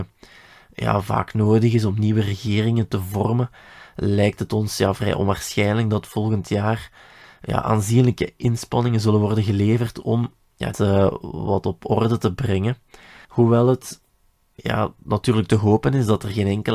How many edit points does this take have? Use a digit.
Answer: 2